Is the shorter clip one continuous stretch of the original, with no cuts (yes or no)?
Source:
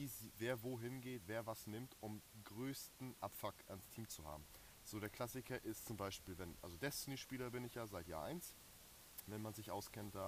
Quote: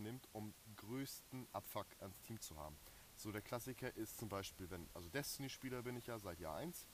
yes